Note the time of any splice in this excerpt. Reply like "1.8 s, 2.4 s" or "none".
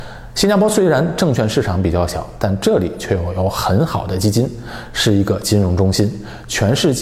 none